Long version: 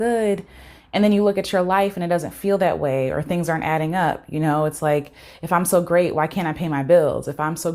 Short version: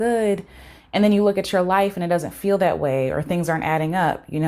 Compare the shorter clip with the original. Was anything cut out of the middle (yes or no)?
no